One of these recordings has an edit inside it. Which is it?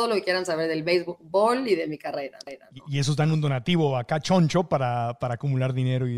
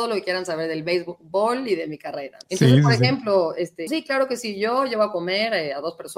second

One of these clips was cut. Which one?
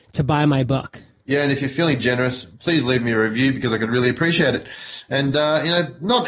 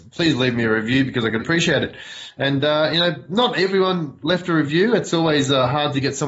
second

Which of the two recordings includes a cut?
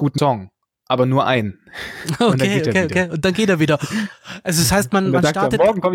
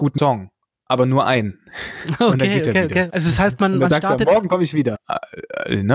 second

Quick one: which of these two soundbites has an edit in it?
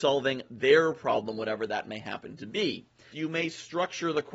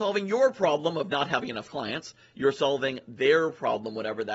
first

